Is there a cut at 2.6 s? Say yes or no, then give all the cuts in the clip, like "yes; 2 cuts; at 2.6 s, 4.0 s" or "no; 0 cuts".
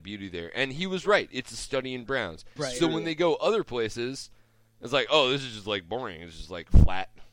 yes; 1 cut; at 2.6 s